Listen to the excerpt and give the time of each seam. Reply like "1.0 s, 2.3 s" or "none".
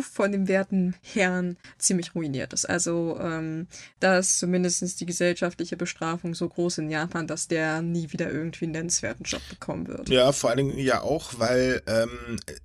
none